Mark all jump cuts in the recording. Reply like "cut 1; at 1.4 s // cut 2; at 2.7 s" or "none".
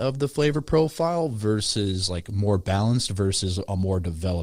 none